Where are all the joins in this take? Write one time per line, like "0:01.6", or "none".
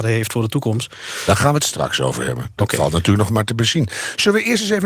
none